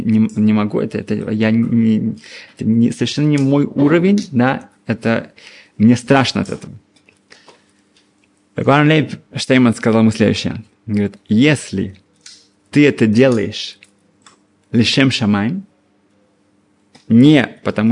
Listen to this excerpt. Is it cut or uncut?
uncut